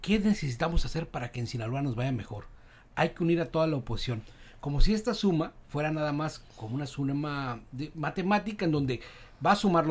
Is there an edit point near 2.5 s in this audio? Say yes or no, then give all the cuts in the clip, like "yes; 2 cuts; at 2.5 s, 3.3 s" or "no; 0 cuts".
no; 0 cuts